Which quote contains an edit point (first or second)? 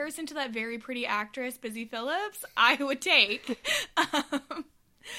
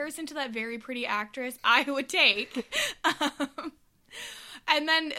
second